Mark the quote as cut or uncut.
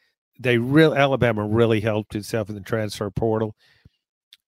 uncut